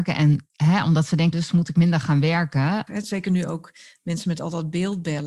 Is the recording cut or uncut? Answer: cut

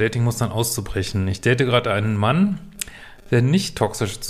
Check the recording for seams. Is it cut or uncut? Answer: uncut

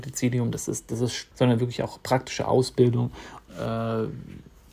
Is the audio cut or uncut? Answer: cut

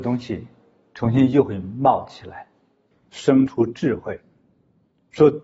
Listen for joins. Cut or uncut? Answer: cut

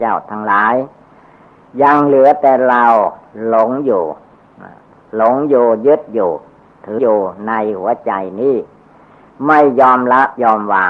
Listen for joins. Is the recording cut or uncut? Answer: cut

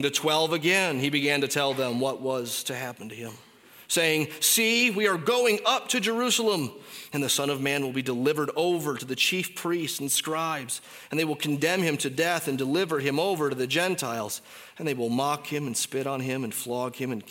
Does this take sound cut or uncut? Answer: uncut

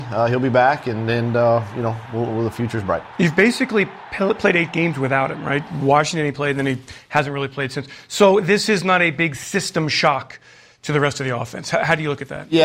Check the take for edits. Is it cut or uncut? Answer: uncut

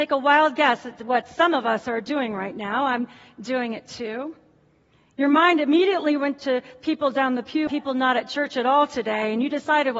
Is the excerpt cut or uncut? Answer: cut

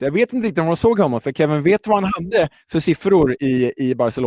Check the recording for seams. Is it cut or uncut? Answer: uncut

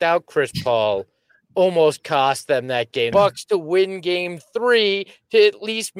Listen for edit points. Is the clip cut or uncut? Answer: cut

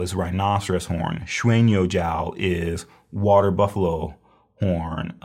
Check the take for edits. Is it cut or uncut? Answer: uncut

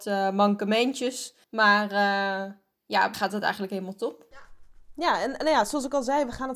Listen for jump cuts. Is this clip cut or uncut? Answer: cut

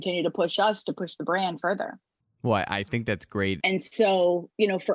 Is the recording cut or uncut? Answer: cut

